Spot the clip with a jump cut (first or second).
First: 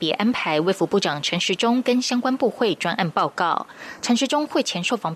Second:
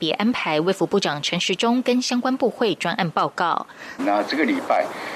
second